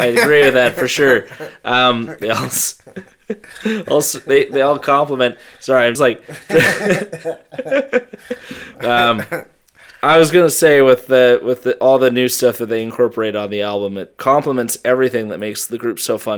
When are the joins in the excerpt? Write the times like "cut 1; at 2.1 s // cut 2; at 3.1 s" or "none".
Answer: cut 1; at 2.2 s // cut 2; at 6.0 s